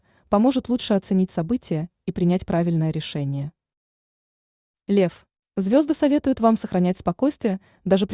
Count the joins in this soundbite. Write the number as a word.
one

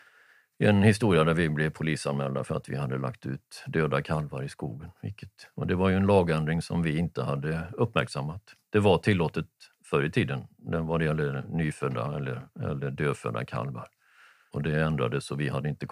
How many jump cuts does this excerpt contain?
zero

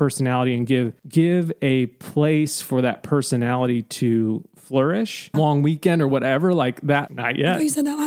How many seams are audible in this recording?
three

